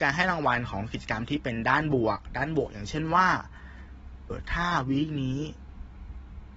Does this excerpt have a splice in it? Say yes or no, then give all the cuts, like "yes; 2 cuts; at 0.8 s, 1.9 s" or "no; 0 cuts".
yes; 1 cut; at 4.3 s